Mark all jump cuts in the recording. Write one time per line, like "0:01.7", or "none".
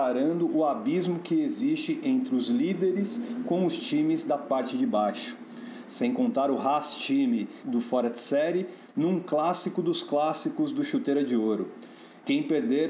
0:07.6

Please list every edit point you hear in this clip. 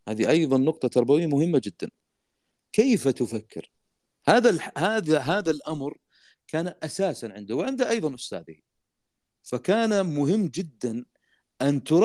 none

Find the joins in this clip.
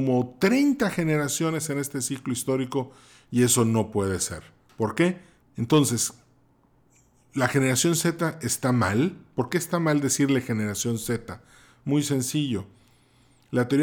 0:05.4

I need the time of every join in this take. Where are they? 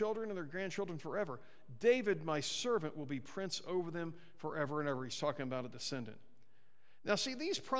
none

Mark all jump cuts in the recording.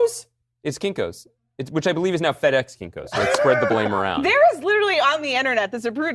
none

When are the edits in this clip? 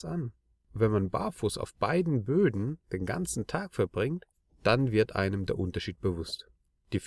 0:02.8

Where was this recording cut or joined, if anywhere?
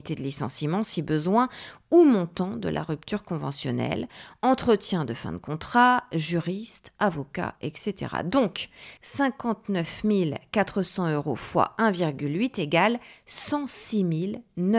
0:07.6
0:09.0

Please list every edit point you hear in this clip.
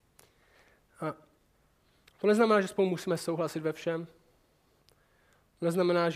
none

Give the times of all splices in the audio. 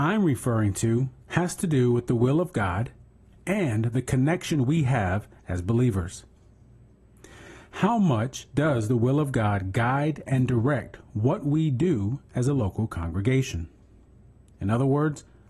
none

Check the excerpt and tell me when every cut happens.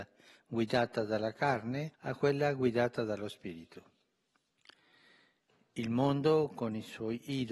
0:01.9

